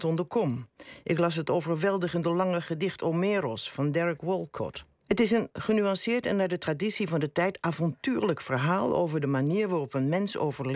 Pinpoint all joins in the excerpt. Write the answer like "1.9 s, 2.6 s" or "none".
5.0 s